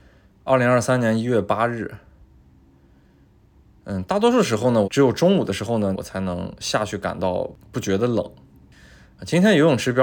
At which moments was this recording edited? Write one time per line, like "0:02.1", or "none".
0:04.8
0:05.9